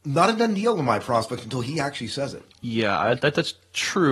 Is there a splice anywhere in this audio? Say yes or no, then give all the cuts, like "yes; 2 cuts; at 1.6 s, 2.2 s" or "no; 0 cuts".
no; 0 cuts